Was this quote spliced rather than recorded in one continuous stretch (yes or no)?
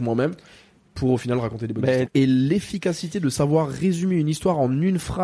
yes